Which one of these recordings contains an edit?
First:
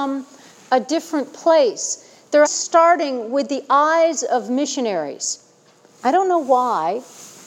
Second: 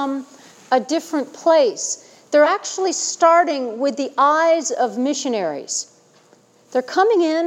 first; 2 cuts; at 2.5 s, 5.9 s

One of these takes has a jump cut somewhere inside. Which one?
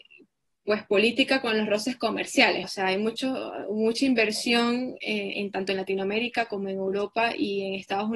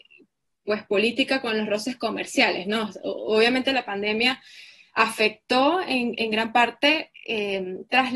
first; 1 cut; at 2.6 s

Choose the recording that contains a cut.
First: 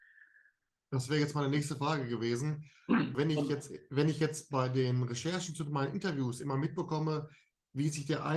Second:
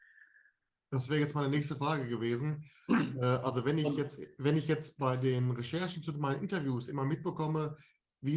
first; 1 cut; at 3.1 s

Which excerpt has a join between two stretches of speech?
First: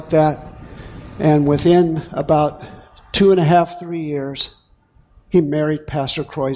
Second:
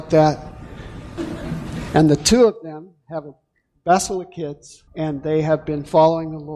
second; 2 cuts; at 1.2 s, 4.9 s

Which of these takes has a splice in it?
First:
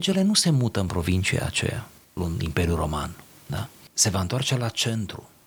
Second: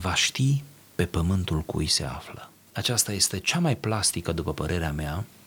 first; 1 cut; at 2.2 s

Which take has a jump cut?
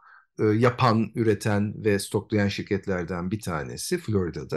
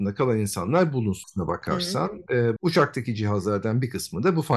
second; 2 cuts; at 1.2 s, 2.6 s

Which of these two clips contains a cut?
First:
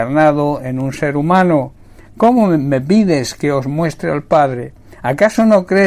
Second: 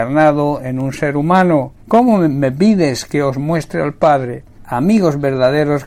second; 2 cuts; at 1.8 s, 4.6 s

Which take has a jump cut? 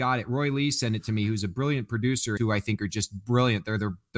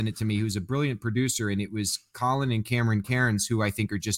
first; 1 cut; at 2.4 s

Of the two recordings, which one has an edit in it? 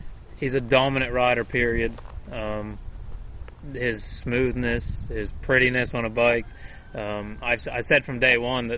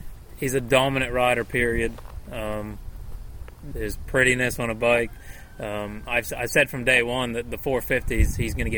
second; 1 cut; at 3.7 s

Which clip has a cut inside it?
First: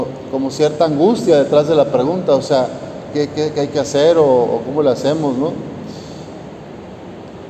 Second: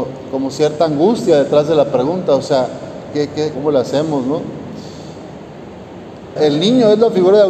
second; 2 cuts; at 3.5 s, 6.4 s

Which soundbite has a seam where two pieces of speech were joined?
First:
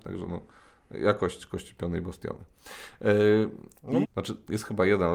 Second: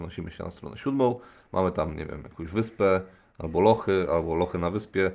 first; 1 cut; at 4.0 s

